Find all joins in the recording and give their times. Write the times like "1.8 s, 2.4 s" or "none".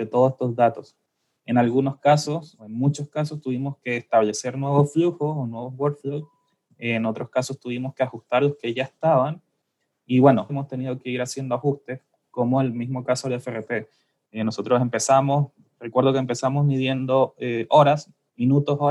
10.5 s

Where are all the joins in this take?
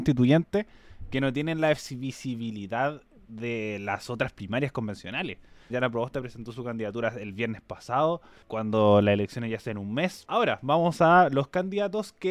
5.7 s, 10.2 s

